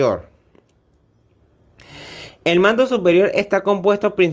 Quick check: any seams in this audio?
no; 0 cuts

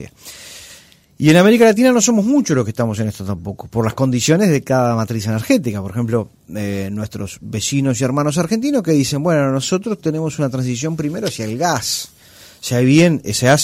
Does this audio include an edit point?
no; 0 cuts

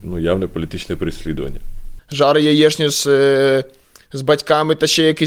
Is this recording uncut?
no; 1 cut; at 2.0 s

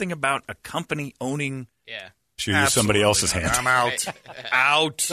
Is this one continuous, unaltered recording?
no; 1 cut; at 2.4 s

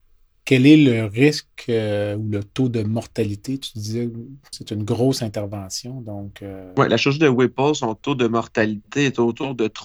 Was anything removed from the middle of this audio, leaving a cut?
yes; 1 cut; at 4.5 s

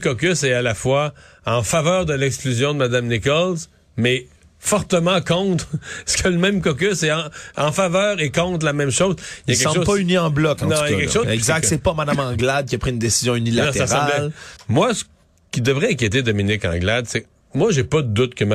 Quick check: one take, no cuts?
no; 2 cuts; at 11.2 s, 14.6 s

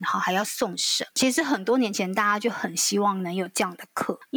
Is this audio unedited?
no; 1 cut; at 1.1 s

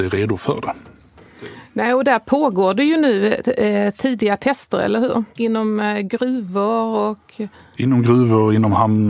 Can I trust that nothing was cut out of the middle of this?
no; 1 cut; at 5.4 s

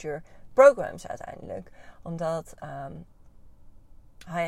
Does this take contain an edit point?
no; 0 cuts

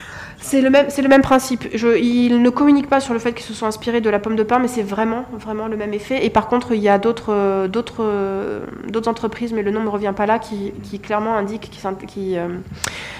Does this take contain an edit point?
no; 0 cuts

